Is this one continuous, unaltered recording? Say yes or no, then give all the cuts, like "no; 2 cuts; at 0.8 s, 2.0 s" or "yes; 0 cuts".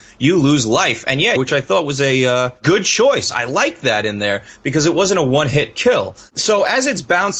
no; 1 cut; at 1.4 s